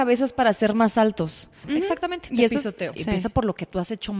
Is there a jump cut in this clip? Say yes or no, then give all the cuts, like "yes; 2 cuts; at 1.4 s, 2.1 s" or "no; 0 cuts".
yes; 2 cuts; at 1.6 s, 3.0 s